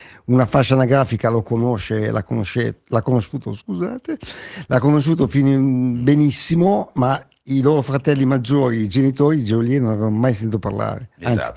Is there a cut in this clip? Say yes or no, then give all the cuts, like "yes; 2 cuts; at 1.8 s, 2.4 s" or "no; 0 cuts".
no; 0 cuts